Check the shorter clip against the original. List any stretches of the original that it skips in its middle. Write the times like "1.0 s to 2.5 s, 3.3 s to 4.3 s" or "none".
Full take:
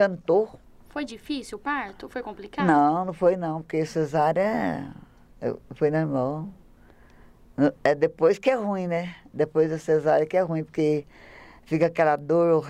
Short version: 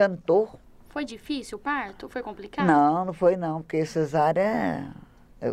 none

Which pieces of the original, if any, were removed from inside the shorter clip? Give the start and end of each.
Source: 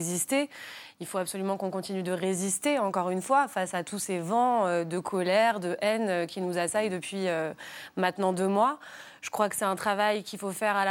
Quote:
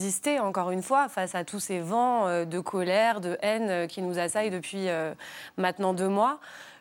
none

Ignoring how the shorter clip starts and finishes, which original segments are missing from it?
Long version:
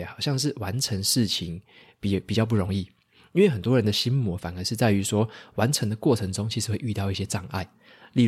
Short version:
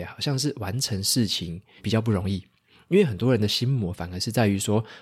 1.8 s to 2.2 s

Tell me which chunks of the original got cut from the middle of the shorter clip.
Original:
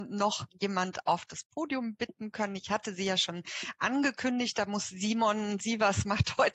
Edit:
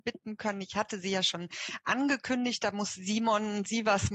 none

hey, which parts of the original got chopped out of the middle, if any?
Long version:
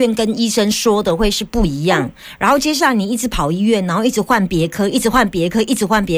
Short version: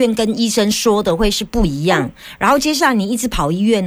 none

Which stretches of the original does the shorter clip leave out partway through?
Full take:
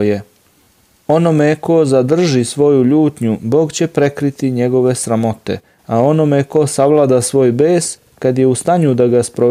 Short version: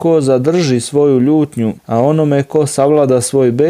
3.4 s to 5.8 s

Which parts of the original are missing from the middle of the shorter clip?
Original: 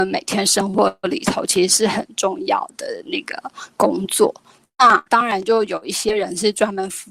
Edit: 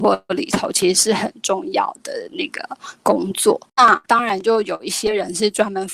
4.4 s to 4.7 s

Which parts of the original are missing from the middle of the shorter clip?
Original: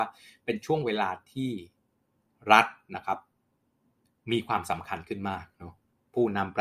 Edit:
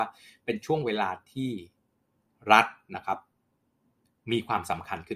none

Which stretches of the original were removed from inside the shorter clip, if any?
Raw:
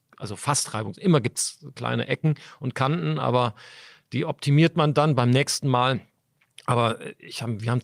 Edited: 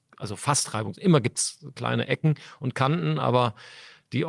none

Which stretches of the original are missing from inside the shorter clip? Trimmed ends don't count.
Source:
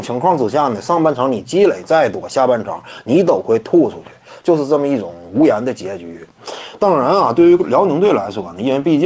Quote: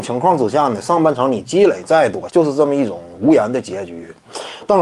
2.3 s to 4.4 s

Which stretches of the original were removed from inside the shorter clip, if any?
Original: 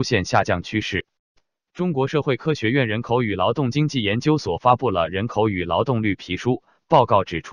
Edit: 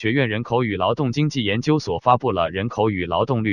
none

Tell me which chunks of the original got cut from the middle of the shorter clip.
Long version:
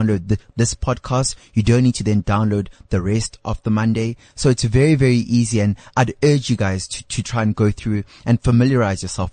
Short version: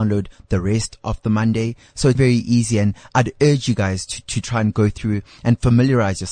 4.6 s to 5.0 s

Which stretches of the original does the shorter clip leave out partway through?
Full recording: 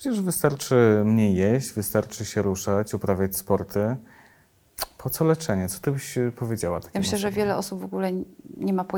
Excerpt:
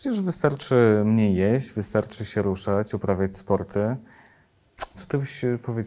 4.9 s to 5.7 s

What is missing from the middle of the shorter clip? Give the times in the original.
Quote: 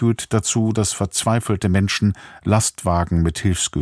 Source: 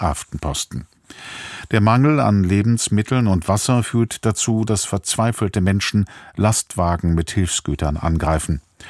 none

